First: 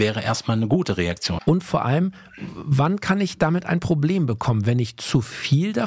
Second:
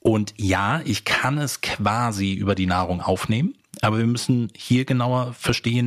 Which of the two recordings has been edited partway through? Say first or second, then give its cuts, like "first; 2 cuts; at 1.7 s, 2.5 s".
first; 1 cut; at 1.4 s